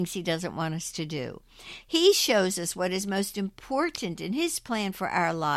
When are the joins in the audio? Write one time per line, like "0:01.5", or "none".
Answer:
none